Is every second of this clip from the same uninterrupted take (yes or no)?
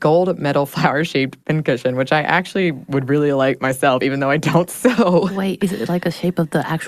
yes